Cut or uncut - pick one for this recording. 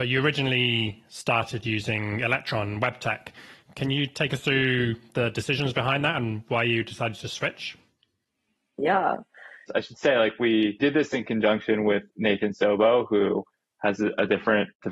cut